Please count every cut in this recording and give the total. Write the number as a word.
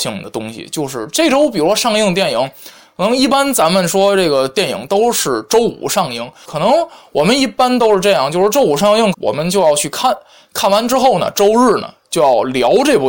two